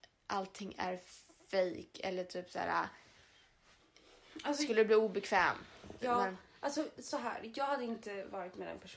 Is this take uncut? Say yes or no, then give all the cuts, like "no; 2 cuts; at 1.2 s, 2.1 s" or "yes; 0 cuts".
no; 1 cut; at 6.0 s